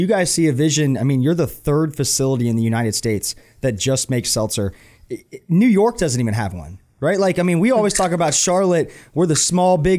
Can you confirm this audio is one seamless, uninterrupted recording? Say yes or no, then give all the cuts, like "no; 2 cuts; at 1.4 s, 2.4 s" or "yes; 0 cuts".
yes; 0 cuts